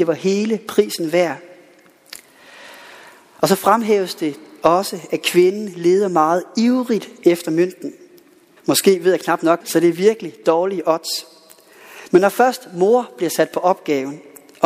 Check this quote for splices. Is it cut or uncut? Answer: cut